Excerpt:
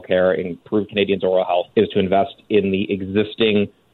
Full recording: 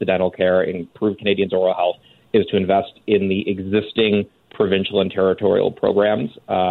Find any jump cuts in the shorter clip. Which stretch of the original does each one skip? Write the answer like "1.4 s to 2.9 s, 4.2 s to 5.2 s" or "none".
2.0 s to 2.3 s